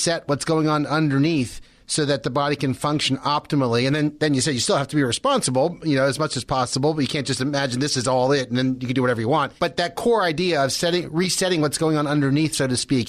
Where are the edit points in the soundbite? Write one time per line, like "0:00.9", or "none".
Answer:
0:09.6